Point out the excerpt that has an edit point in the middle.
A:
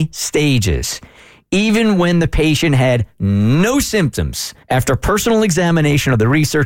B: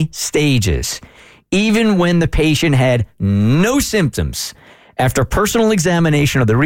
A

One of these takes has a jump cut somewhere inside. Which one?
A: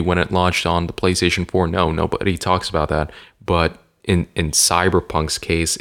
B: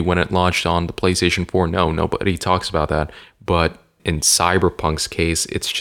B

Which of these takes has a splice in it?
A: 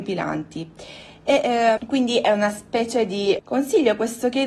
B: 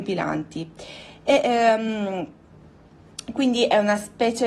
A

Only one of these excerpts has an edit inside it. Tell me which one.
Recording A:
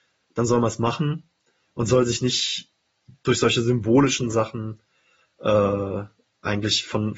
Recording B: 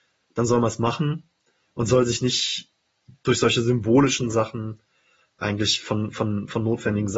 B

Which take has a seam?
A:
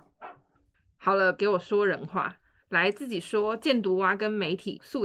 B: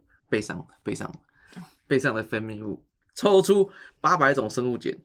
A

